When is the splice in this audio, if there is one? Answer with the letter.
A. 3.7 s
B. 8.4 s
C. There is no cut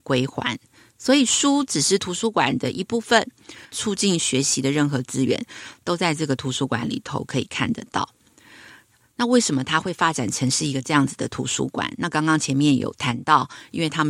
A